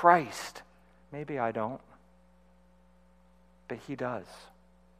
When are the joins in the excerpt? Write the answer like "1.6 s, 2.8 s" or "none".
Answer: 1.0 s